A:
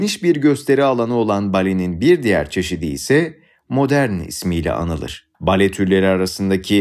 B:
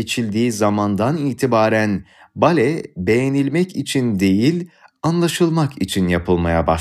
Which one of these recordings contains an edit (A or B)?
A